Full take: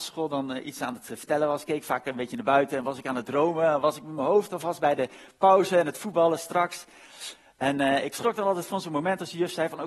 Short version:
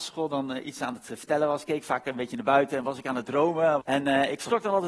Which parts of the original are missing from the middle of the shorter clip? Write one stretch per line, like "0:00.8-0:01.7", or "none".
0:03.8-0:07.5